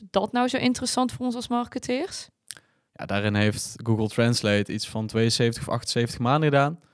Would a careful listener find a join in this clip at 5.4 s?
no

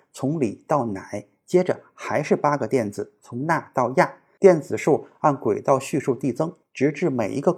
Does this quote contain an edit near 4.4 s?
yes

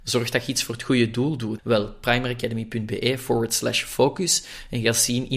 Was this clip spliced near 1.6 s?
yes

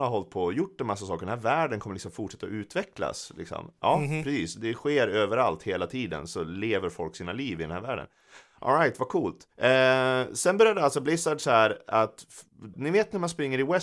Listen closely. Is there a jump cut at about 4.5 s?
no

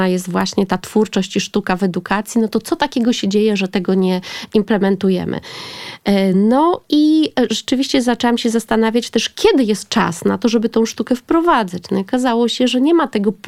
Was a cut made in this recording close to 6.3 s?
no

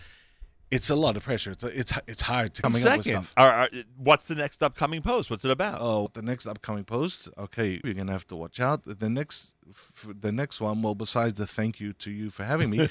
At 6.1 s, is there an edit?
yes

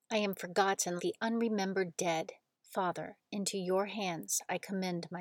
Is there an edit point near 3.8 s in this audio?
no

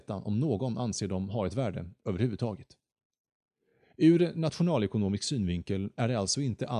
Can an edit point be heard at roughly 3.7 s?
no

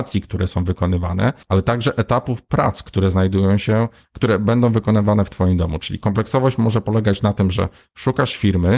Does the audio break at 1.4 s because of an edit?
yes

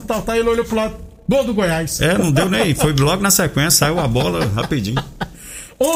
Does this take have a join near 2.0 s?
no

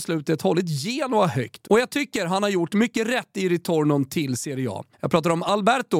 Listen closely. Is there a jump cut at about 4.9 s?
yes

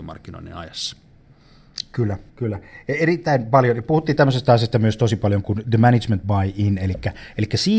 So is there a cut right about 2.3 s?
yes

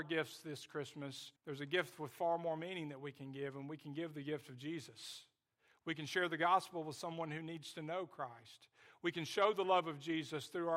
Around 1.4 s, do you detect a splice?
yes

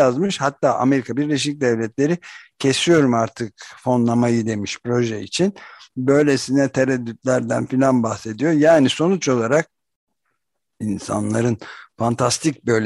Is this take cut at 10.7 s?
no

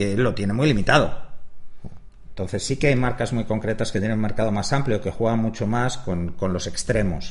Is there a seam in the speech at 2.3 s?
yes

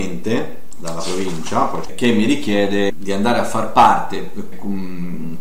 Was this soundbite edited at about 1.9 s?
yes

